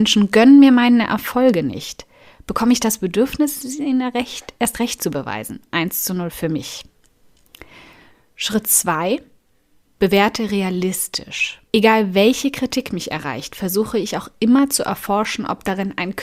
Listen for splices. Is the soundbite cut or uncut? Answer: cut